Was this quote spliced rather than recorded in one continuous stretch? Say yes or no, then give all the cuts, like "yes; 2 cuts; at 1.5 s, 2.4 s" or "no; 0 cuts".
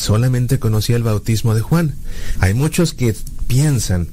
yes; 1 cut; at 2.4 s